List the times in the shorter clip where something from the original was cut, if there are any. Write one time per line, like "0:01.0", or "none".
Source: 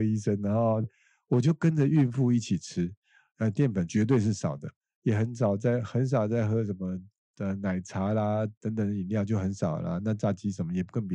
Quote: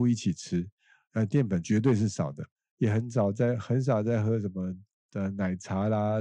none